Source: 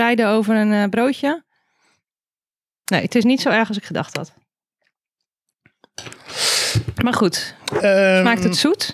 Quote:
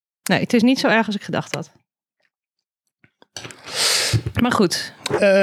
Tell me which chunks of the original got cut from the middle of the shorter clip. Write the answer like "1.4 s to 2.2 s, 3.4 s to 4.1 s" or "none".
none